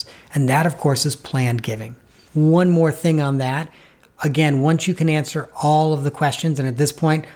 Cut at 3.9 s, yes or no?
no